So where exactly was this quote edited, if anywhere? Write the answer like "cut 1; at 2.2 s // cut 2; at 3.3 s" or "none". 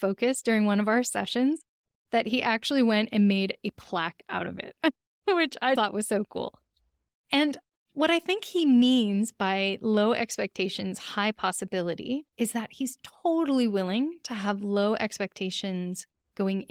cut 1; at 5.8 s // cut 2; at 12.3 s